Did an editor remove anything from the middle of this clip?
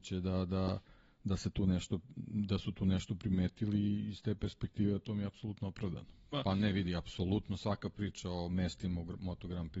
yes; 1 cut; at 6.3 s

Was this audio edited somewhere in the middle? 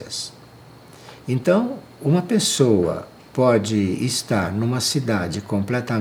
no; 0 cuts

